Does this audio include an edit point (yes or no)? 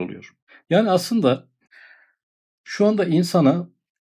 no